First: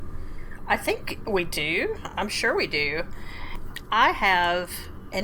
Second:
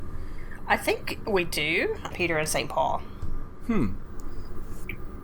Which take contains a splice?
second; 1 cut; at 2.1 s

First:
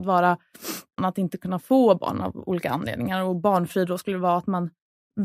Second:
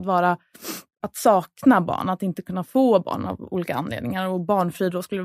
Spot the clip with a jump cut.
first; 1 cut; at 1.0 s

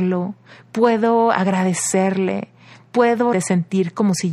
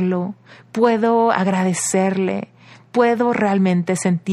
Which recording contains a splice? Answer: first; 1 cut; at 3.3 s

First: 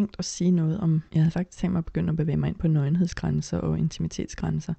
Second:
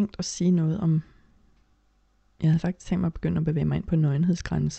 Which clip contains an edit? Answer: first; 1 cut; at 1.1 s

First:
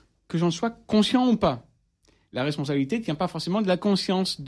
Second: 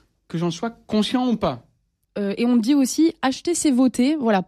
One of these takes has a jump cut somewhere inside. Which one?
second; 1 cut; at 2.0 s

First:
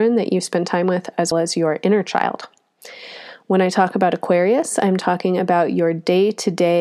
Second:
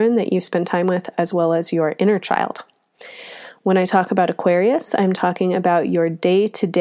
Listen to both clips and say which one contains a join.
first; 1 cut; at 1.3 s

